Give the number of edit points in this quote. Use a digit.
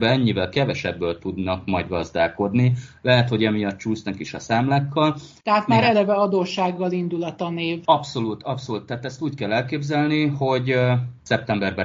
0